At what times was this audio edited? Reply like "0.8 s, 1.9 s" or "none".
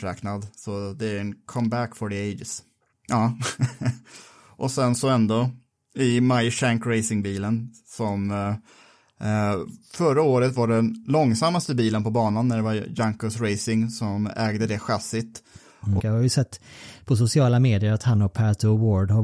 2.9 s, 16.0 s

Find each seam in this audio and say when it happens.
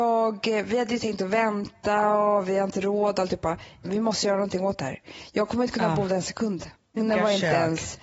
3.8 s, 7.0 s

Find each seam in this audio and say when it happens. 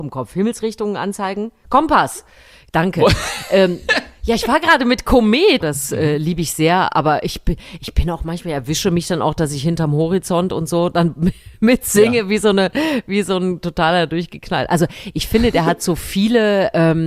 5.6 s

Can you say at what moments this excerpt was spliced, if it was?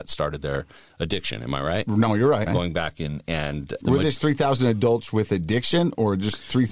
2.5 s, 3.8 s

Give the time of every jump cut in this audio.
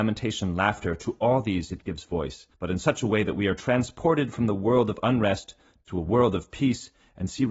2.5 s

